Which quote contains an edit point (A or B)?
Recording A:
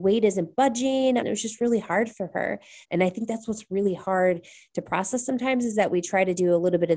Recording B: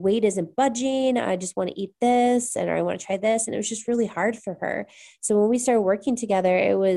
A